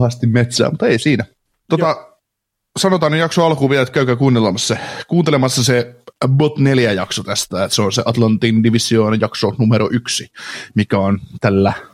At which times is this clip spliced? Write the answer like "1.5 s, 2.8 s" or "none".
none